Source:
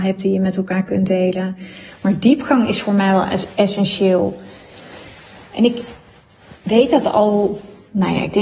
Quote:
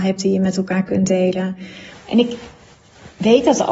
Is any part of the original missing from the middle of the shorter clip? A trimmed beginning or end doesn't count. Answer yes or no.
yes